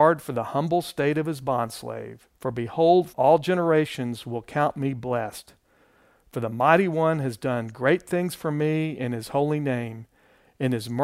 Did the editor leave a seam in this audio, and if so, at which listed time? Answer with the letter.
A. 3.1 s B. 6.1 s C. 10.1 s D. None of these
A